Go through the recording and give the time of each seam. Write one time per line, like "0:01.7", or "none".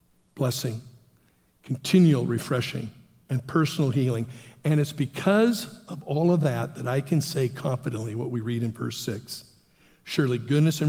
none